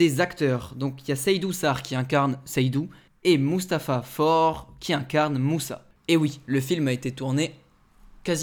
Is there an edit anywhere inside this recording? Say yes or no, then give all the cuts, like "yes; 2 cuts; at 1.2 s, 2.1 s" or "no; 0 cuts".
yes; 1 cut; at 6.0 s